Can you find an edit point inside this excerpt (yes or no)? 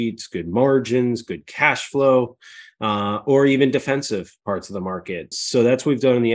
yes